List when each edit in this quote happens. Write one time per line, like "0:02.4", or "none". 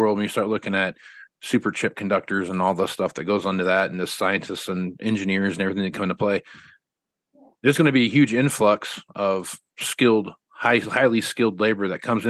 none